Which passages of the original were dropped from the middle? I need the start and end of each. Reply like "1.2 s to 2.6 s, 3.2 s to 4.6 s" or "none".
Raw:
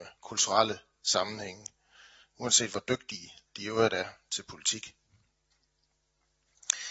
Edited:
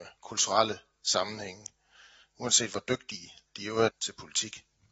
3.9 s to 4.2 s

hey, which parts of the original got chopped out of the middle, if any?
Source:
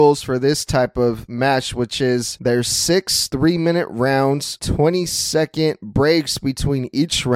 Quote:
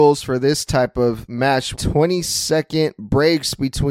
1.7 s to 4.6 s

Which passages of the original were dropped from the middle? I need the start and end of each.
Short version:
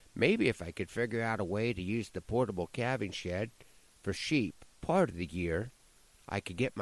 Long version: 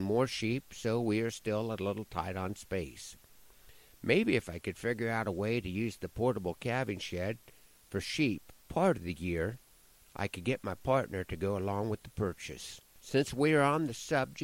none

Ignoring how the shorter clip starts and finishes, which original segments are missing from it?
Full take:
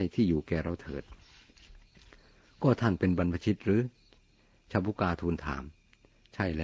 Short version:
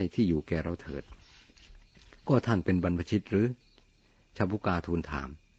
2.2 s to 2.5 s

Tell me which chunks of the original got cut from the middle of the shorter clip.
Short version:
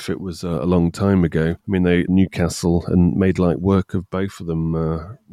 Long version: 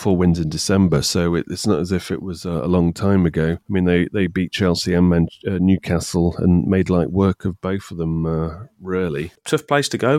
4.1 s to 5.6 s

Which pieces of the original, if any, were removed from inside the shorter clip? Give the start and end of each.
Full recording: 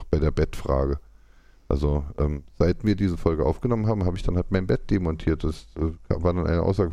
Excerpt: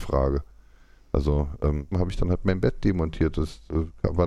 2.5 s to 4.0 s

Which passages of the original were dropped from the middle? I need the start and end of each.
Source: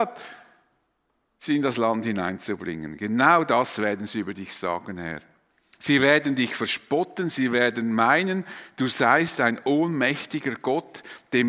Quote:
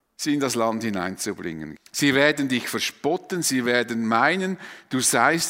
3.0 s to 5.6 s

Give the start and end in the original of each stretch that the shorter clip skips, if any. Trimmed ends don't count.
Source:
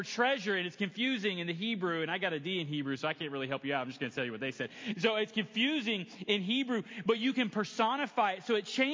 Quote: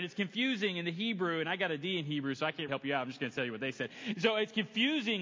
3.3 s to 3.5 s

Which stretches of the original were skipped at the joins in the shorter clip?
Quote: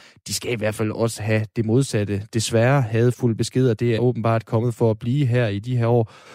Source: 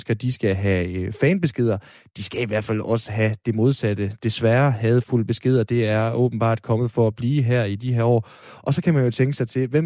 5.9 s to 6.1 s

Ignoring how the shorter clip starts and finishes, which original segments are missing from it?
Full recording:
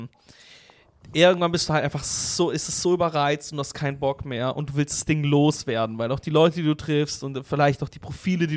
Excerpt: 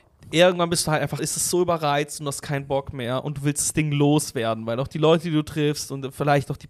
2.0 s to 2.5 s

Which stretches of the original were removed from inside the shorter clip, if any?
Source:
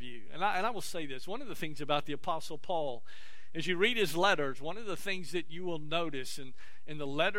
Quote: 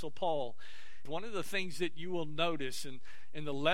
3.5 s to 4.6 s

